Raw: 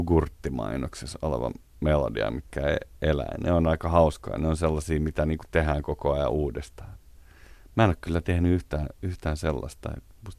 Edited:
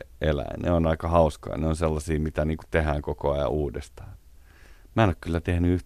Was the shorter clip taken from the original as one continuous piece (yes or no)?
yes